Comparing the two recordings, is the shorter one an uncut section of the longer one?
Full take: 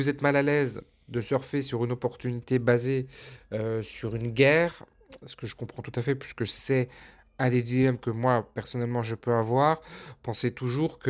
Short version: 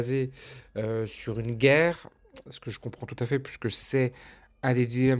yes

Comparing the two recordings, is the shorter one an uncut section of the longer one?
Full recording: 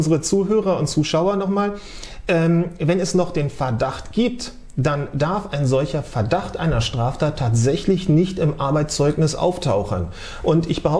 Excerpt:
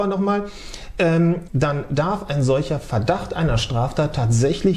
no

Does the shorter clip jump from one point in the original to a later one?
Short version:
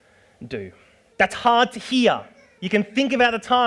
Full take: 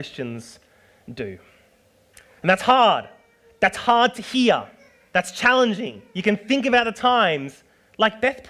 yes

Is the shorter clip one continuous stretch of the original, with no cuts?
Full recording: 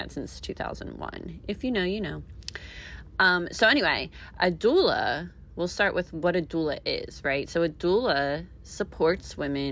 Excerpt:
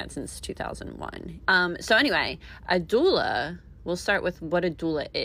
no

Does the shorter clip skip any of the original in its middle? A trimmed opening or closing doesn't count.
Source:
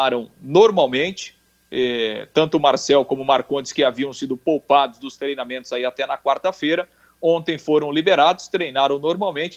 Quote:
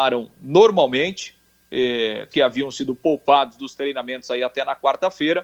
yes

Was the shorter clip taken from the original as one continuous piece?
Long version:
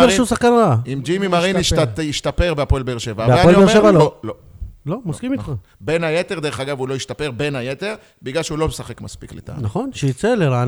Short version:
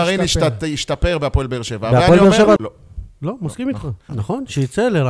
no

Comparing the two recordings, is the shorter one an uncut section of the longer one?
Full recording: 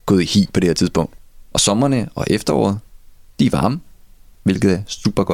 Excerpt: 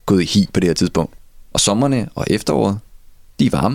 yes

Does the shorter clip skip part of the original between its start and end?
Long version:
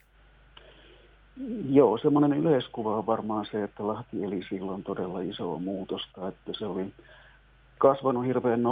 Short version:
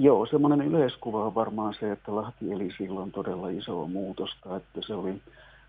no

